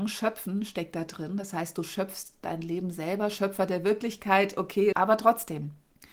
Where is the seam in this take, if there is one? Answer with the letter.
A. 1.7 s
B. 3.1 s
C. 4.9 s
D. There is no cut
C